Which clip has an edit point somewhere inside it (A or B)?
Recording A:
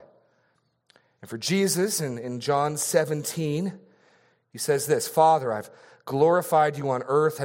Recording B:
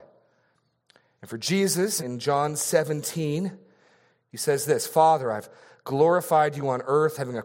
B